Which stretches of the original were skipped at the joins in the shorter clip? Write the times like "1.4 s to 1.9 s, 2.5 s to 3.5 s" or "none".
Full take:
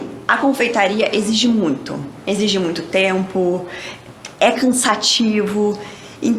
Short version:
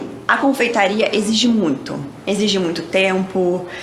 none